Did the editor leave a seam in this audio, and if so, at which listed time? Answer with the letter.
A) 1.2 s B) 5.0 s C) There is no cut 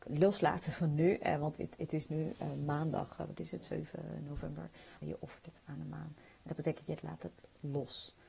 B